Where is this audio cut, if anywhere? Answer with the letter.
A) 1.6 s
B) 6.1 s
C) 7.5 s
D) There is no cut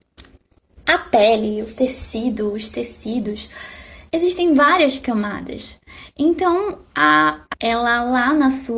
C